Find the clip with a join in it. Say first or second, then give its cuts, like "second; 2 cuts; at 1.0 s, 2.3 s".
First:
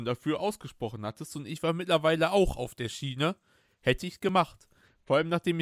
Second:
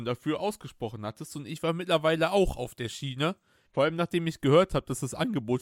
second; 1 cut; at 3.7 s